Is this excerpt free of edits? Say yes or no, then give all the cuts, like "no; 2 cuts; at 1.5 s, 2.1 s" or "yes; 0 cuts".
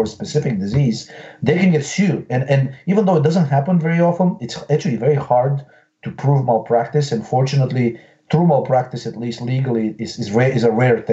yes; 0 cuts